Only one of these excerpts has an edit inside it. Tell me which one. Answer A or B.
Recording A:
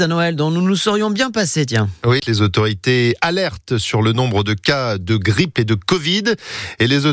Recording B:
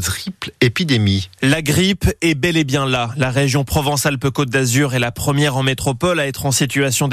A